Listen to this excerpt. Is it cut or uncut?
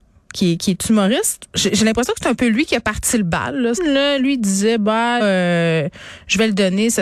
cut